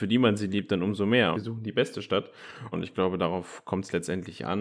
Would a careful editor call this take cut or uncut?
cut